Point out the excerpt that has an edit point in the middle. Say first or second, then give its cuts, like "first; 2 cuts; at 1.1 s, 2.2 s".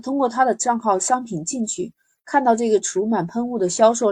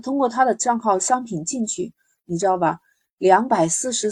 second; 1 cut; at 2.2 s